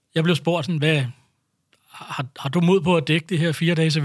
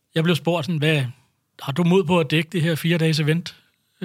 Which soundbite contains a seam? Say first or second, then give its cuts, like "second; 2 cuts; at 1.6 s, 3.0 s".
second; 1 cut; at 1.5 s